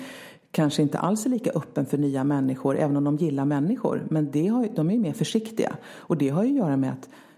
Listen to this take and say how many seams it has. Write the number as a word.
zero